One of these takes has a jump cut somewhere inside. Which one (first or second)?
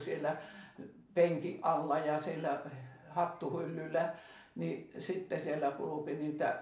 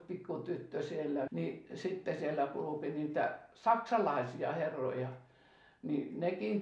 second